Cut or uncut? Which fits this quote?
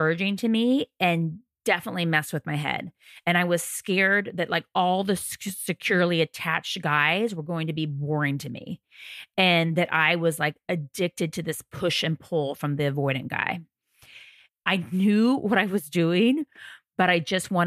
cut